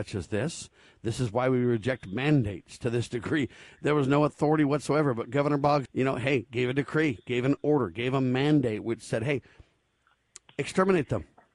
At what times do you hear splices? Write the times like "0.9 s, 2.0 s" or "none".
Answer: 5.9 s